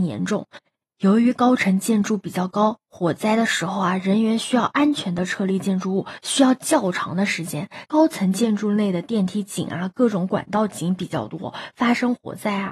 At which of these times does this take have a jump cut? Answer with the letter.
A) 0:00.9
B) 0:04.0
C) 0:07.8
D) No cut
C